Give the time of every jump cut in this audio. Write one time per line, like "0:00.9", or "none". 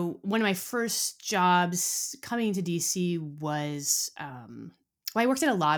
none